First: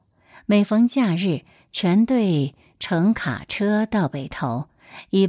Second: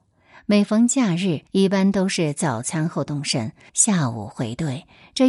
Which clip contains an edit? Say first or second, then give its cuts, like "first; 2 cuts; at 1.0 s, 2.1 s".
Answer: second; 2 cuts; at 1.5 s, 3.7 s